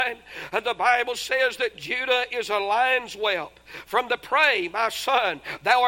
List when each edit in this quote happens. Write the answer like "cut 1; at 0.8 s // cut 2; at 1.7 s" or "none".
none